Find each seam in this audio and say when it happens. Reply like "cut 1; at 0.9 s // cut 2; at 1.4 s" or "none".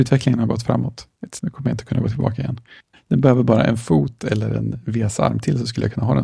cut 1; at 1.4 s // cut 2; at 2.9 s